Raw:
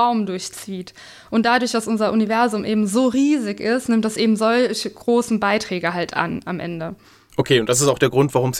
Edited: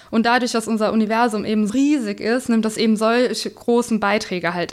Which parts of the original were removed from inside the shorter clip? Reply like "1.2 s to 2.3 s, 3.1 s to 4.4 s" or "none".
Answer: 2.9 s to 3.1 s